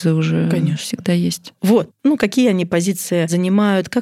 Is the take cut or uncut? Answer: cut